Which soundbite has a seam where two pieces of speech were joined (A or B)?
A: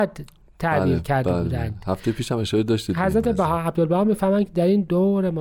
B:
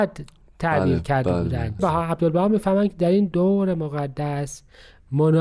B